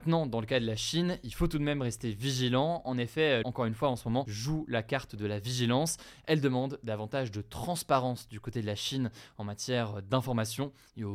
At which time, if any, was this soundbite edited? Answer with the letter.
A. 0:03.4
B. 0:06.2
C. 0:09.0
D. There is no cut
A